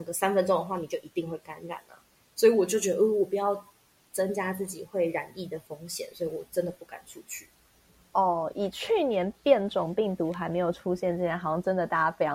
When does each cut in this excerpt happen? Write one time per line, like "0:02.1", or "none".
none